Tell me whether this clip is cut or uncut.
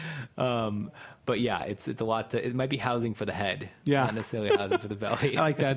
uncut